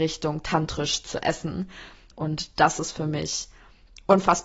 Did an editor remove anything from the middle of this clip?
yes; 1 cut; at 2.1 s

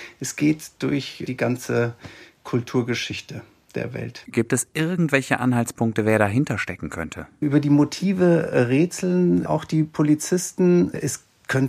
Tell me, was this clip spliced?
no; 0 cuts

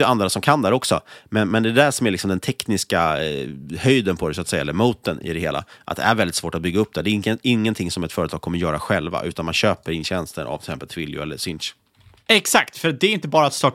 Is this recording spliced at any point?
no; 0 cuts

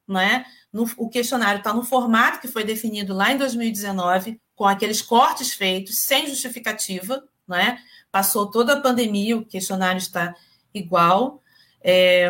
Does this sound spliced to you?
no; 0 cuts

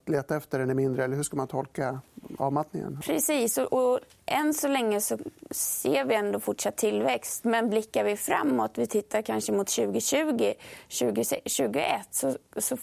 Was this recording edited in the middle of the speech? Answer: no; 0 cuts

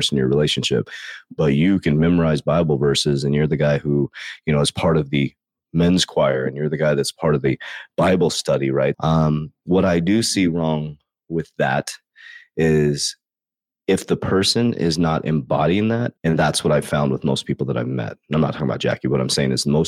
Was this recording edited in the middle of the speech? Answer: yes; 2 cuts; at 8.9 s, 16.2 s

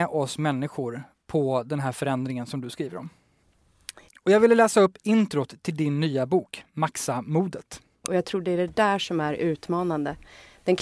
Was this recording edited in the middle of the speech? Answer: yes; 2 cuts; at 4.1 s, 8.0 s

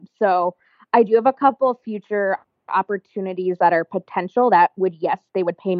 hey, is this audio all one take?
yes; 0 cuts

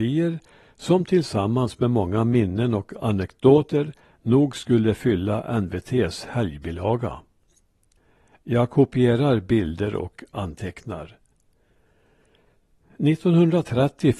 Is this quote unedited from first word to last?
yes; 0 cuts

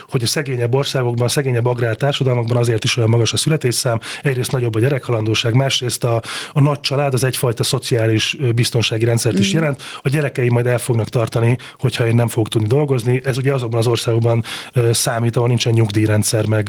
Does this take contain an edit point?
no; 0 cuts

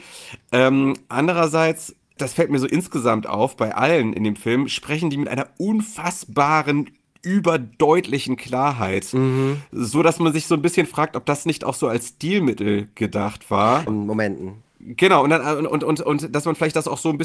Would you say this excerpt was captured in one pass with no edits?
no; 2 cuts; at 2.2 s, 13.9 s

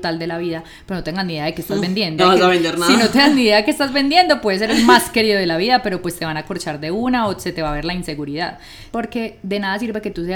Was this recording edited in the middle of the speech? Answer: yes; 2 cuts; at 2.2 s, 8.9 s

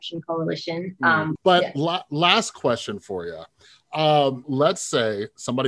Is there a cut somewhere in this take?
yes; 2 cuts; at 1.4 s, 4.4 s

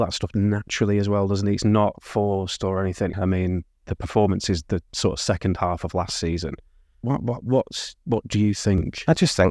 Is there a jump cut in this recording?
yes; 2 cuts; at 3.1 s, 7.0 s

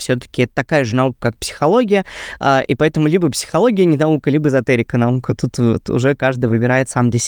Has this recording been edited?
no; 0 cuts

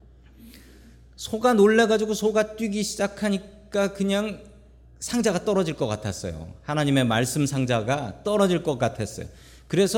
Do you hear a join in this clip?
no; 0 cuts

